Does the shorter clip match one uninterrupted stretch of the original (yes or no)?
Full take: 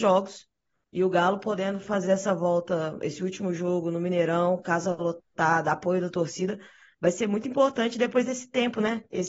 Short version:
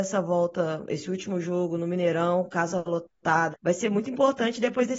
no